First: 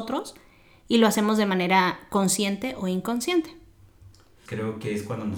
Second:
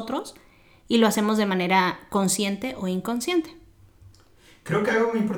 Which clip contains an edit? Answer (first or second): first